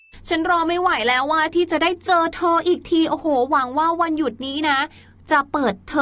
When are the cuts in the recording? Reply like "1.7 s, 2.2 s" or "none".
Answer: none